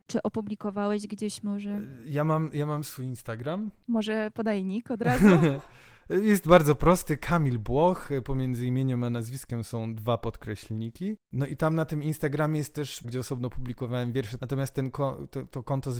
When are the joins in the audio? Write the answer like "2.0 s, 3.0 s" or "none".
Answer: 13.0 s, 14.4 s